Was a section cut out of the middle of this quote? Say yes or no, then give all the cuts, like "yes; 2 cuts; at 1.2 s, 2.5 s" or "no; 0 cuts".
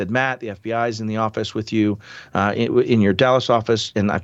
no; 0 cuts